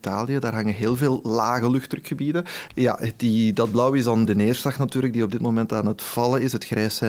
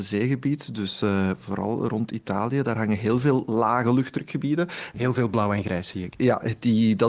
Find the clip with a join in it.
first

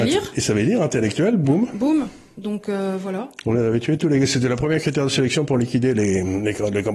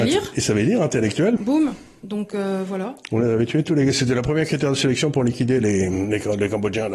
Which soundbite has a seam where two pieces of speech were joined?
second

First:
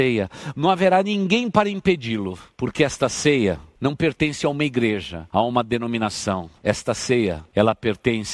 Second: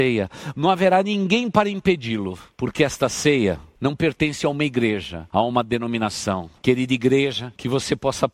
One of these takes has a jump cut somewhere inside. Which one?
second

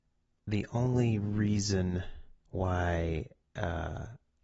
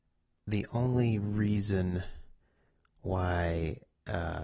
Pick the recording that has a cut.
first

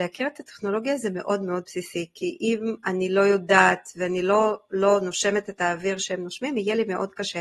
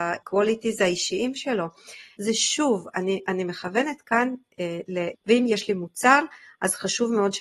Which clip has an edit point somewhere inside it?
second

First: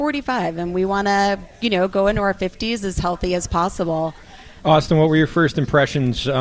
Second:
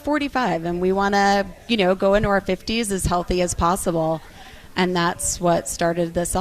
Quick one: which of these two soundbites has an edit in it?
first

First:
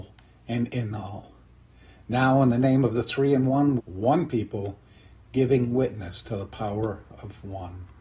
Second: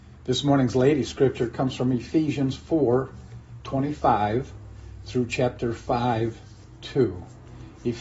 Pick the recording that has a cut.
first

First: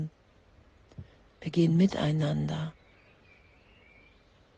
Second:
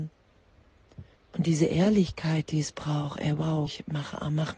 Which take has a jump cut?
second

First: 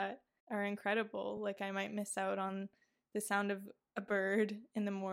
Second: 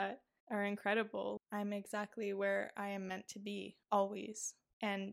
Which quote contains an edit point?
second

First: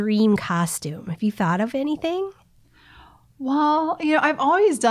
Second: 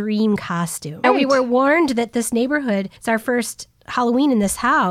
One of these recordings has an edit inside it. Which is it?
second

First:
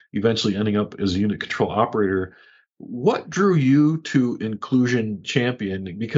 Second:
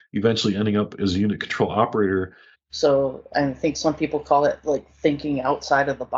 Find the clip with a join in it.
second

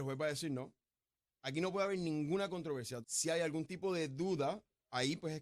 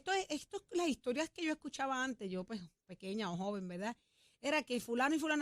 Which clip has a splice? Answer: first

